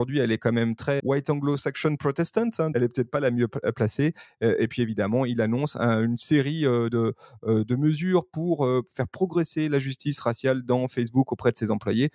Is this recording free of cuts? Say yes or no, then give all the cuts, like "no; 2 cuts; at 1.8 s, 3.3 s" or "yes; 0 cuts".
no; 2 cuts; at 1.0 s, 2.7 s